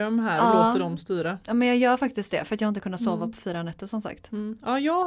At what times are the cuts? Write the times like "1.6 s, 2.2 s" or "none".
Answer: none